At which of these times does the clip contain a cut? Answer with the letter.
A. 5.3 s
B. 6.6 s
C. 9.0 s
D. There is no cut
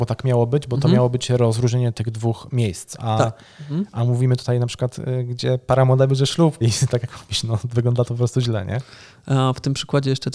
B